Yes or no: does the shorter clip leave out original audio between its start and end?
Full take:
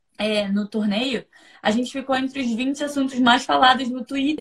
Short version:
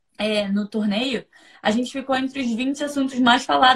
no